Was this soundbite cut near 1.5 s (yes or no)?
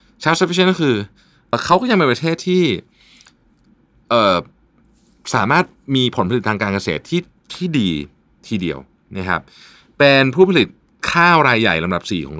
yes